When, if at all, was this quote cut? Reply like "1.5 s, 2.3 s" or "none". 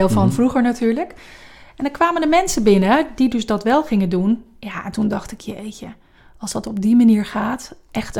none